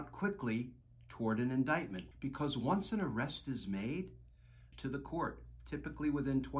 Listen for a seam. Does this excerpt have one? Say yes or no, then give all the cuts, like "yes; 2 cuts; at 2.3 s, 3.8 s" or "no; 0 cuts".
yes; 2 cuts; at 2.1 s, 4.7 s